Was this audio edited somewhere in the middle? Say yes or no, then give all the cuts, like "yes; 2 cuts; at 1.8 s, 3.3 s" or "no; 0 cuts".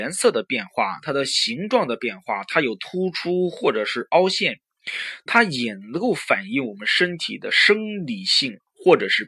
no; 0 cuts